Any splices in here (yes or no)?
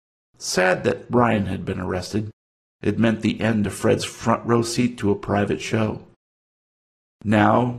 no